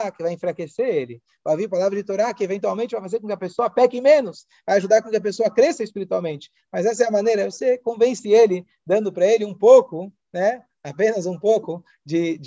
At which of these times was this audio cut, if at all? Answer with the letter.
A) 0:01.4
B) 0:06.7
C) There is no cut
C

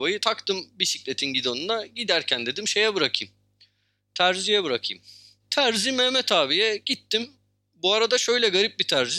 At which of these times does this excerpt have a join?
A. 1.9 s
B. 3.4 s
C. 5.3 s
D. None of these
D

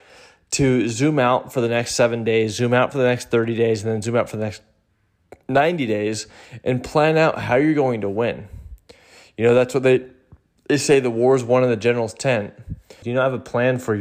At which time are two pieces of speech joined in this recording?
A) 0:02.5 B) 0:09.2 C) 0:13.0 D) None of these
C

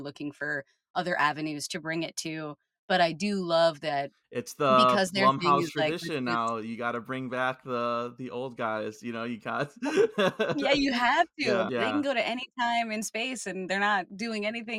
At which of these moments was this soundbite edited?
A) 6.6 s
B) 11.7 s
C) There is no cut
B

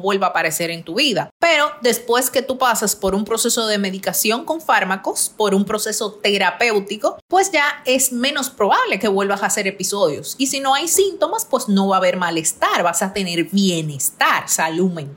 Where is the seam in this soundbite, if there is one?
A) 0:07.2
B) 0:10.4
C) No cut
C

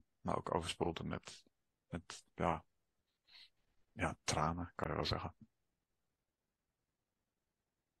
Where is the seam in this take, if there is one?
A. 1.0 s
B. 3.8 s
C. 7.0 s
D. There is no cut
D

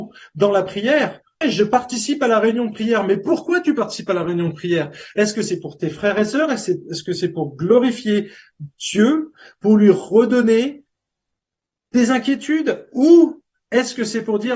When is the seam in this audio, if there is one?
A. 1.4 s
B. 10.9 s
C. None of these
A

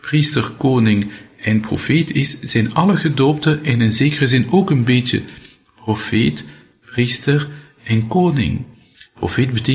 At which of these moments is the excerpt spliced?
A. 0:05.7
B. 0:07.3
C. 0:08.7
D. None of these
D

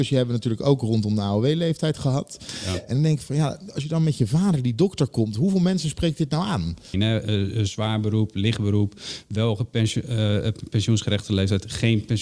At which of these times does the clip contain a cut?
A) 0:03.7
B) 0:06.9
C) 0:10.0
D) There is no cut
B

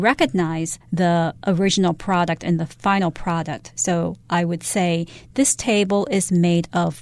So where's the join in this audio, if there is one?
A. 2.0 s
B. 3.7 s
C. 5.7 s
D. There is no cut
D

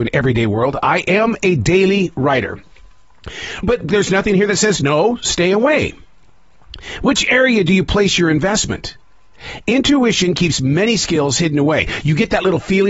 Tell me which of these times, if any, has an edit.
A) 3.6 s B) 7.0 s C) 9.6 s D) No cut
A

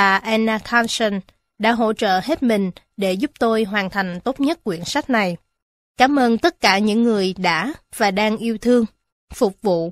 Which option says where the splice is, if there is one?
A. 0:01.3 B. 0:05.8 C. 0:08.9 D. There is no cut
B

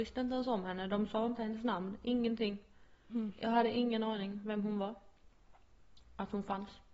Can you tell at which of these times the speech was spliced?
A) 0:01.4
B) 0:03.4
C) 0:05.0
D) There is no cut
D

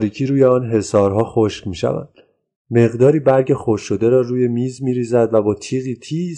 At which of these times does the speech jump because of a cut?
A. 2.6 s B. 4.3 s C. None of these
A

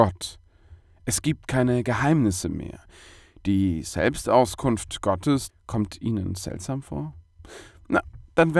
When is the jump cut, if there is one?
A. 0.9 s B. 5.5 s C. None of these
B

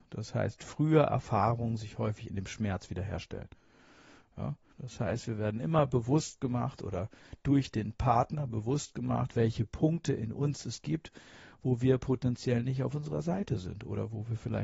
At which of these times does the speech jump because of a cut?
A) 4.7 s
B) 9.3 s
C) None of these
A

